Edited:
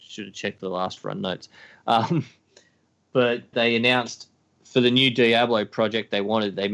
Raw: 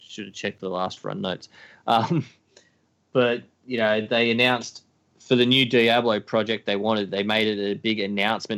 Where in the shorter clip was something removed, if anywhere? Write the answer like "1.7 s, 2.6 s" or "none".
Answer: 3.5 s